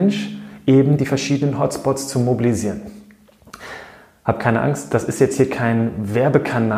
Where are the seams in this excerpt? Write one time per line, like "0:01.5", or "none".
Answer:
none

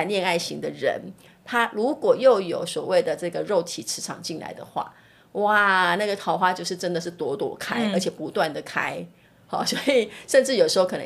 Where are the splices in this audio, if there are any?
none

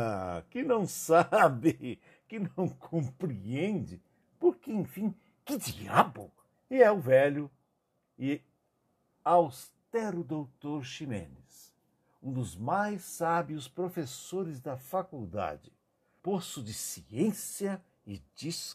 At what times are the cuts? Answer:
0:06.5
0:16.2

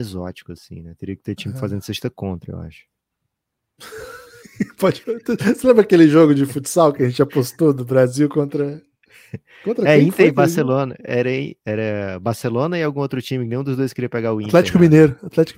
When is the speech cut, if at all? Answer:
none

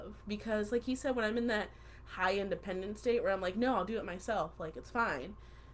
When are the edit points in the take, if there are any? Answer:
none

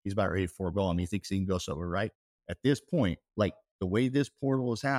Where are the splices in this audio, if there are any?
none

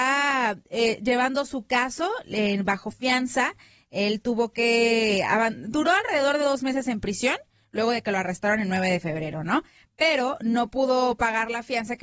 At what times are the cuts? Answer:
0:02.7

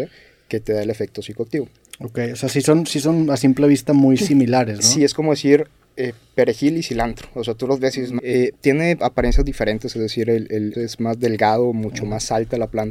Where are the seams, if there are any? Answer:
0:08.2
0:10.7

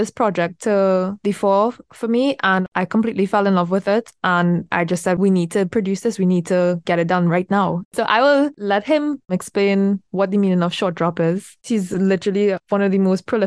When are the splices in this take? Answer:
0:07.8
0:11.6

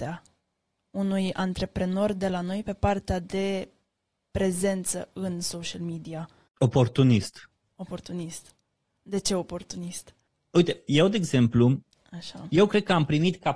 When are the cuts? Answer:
0:10.3

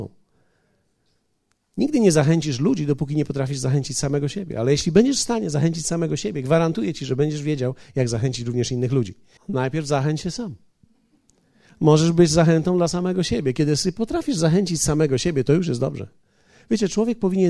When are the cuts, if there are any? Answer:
0:09.4

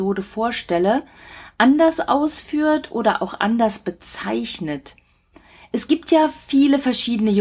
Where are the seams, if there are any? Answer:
none

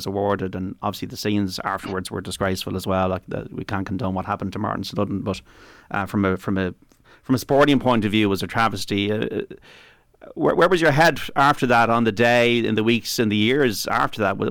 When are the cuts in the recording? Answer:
none

